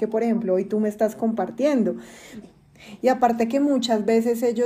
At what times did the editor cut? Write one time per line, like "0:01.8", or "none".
0:02.4